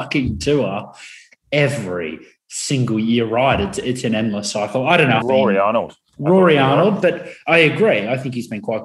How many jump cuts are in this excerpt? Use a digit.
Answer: 1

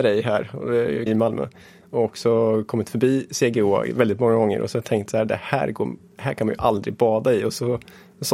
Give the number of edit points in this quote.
1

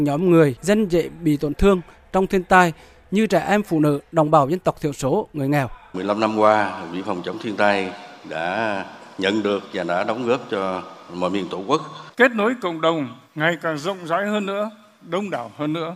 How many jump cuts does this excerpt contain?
2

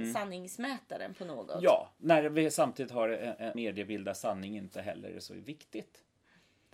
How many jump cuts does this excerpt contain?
1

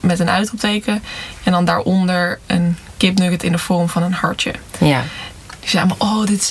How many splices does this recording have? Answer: 2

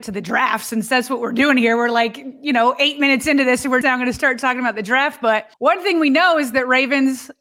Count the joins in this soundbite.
2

